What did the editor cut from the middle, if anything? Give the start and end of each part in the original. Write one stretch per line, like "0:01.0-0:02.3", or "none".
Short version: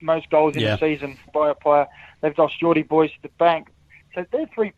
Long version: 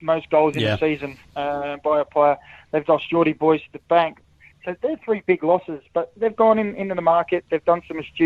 0:01.3-0:01.8